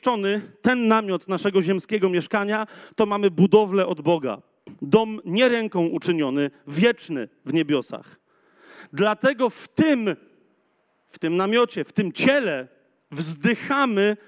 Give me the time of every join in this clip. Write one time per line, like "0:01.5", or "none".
none